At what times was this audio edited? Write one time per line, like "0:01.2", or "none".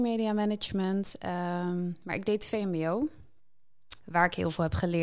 0:04.0